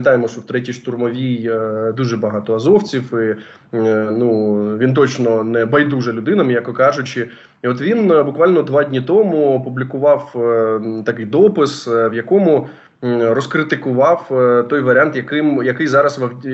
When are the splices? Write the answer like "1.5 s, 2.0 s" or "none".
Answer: none